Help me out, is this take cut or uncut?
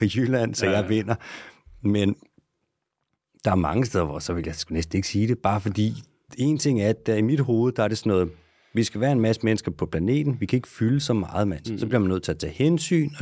cut